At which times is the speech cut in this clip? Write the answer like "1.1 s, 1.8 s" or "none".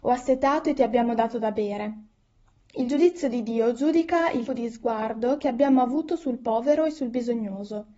4.5 s